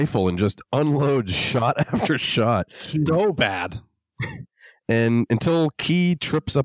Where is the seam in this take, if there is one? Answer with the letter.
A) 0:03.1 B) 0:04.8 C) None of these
A